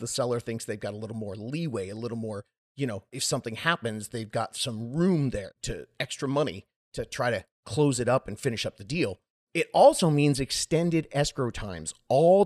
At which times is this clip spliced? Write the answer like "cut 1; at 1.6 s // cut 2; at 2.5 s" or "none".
none